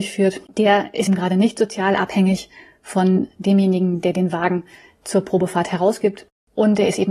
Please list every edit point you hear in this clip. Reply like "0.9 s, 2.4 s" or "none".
1.1 s